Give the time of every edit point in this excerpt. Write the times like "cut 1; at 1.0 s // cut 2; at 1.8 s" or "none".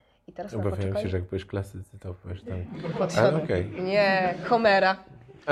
none

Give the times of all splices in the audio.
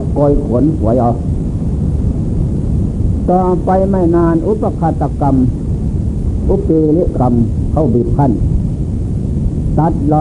cut 1; at 7.1 s

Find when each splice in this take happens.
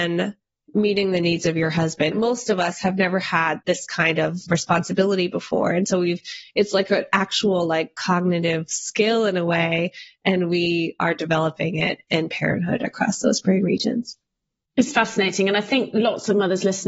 cut 1; at 2.1 s

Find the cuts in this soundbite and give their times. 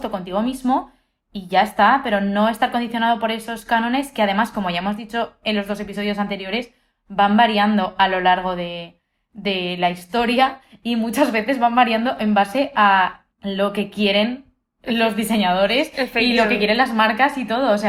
cut 1; at 13.3 s

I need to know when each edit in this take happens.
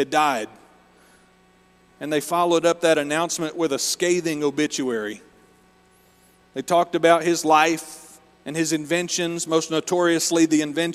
cut 1; at 9.5 s

